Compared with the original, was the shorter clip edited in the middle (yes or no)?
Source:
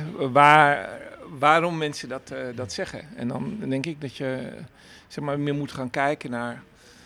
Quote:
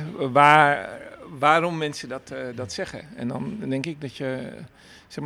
no